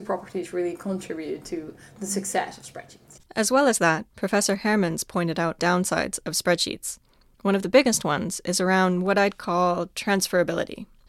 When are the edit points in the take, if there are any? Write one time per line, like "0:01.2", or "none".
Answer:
0:03.3

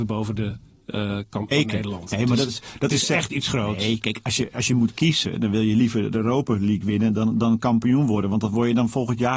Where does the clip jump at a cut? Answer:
0:01.5

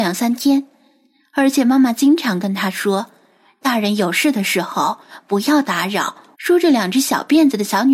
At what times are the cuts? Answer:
0:06.3

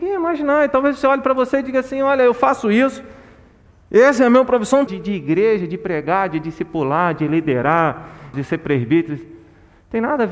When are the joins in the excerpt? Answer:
0:04.9
0:08.3

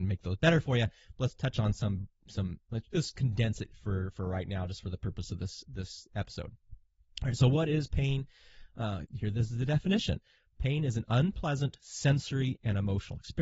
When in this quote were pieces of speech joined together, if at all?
0:09.0

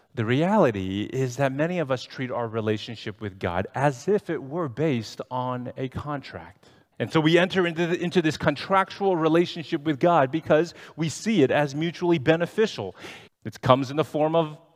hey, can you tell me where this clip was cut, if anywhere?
0:06.9
0:13.3

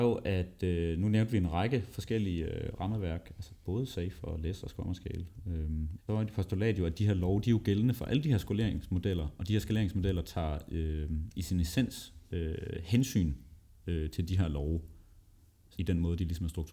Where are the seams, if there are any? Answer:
0:06.0

